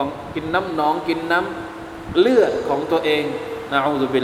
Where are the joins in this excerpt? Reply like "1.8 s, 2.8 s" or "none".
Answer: none